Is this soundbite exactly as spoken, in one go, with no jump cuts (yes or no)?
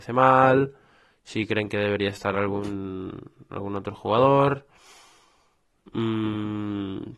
yes